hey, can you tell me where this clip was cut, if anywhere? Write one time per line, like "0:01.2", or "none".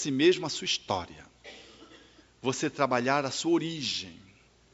0:02.2